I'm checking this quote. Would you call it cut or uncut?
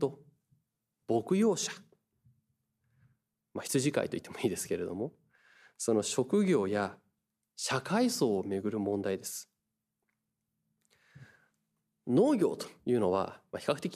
uncut